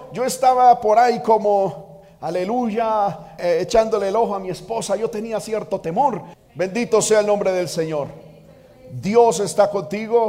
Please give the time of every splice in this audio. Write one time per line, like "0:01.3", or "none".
0:03.4
0:06.3